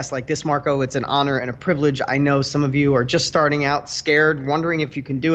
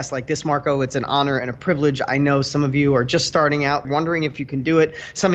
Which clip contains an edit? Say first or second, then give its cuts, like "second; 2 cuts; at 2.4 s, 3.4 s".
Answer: second; 1 cut; at 3.8 s